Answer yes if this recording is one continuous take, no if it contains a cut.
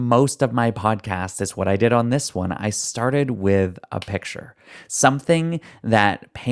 yes